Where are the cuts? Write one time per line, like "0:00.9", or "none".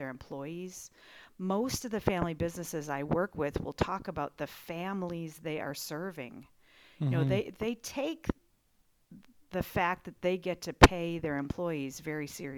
none